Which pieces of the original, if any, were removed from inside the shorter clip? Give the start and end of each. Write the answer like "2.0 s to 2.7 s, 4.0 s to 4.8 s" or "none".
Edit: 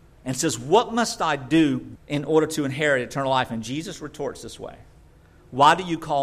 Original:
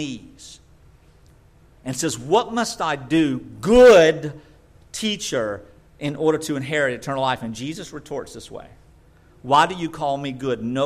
3.5 s to 5.9 s